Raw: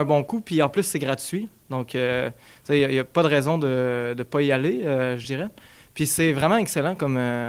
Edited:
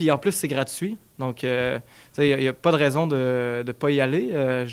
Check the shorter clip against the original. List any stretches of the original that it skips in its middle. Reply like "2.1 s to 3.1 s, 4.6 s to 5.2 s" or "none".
none